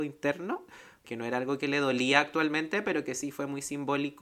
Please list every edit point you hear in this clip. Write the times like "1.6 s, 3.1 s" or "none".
1.0 s